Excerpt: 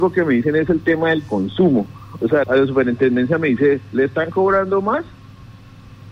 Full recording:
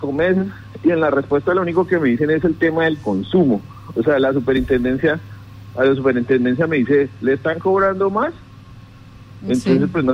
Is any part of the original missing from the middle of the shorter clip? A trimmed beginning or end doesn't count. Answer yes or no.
yes